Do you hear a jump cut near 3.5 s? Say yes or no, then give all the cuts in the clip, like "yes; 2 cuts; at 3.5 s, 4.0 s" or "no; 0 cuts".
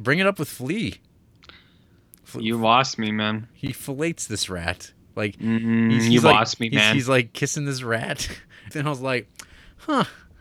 yes; 2 cuts; at 3.5 s, 8.7 s